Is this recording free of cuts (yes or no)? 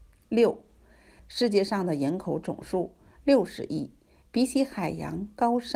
no